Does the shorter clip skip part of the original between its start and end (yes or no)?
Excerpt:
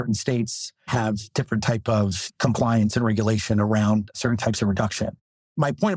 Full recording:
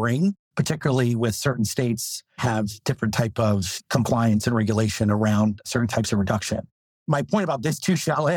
no